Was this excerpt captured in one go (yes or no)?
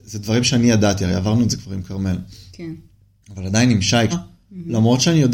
no